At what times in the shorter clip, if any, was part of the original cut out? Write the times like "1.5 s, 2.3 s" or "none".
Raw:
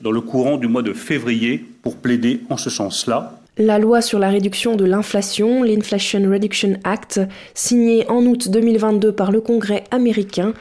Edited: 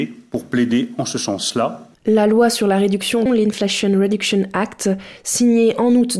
3.3 s